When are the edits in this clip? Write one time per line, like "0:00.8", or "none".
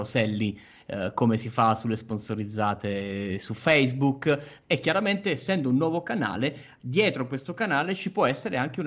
0:04.6